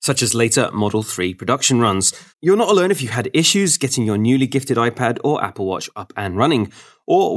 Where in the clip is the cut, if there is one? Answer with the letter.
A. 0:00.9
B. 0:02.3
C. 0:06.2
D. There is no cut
B